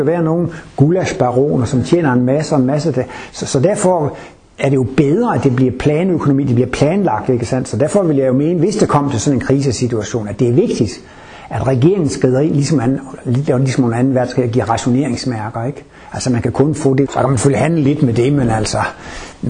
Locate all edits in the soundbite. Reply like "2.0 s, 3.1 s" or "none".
17.1 s